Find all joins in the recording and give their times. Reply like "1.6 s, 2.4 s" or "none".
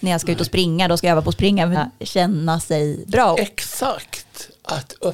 1.7 s, 3.3 s